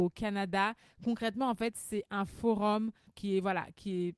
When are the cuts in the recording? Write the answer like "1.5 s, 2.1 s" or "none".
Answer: 3.1 s